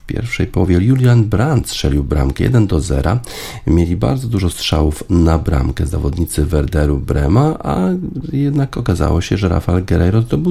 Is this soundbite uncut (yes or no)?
yes